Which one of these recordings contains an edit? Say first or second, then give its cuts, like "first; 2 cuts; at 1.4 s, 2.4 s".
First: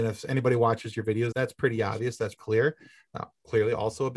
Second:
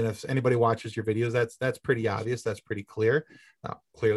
first; 2 cuts; at 1.3 s, 2.4 s